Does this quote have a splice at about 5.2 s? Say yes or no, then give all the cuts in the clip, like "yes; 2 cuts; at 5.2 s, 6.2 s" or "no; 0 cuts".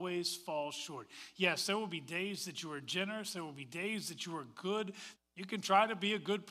yes; 1 cut; at 5.2 s